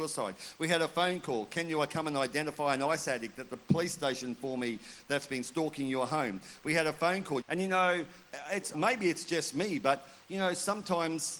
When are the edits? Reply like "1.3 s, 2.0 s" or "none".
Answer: 7.4 s, 8.7 s